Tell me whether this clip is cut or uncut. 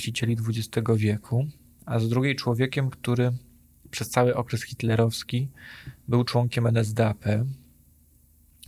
uncut